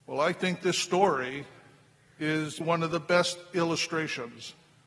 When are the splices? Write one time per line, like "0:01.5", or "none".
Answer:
0:02.6